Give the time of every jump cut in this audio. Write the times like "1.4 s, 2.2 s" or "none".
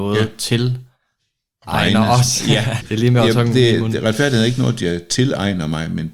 2.8 s